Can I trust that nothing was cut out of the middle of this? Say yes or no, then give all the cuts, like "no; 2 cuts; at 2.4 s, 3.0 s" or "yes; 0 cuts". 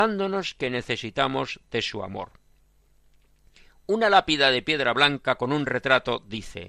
yes; 0 cuts